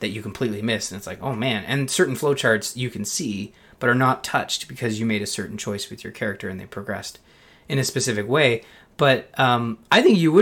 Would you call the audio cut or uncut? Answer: uncut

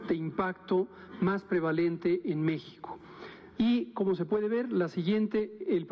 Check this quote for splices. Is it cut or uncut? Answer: cut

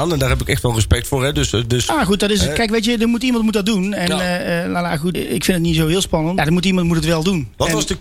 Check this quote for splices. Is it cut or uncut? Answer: cut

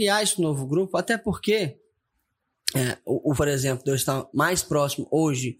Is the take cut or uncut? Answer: cut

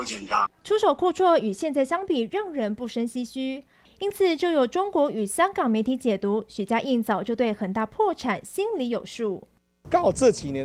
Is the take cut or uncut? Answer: cut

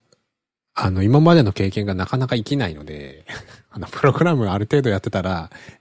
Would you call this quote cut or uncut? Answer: uncut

